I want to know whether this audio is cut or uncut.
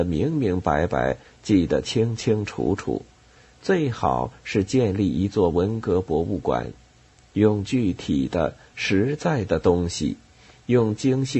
uncut